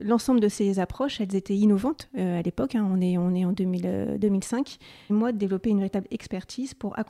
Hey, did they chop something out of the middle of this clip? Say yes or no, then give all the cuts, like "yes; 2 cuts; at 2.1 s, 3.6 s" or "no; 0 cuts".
yes; 1 cut; at 5.1 s